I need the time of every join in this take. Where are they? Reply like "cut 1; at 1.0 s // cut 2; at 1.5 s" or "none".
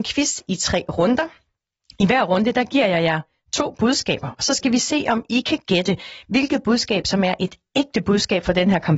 none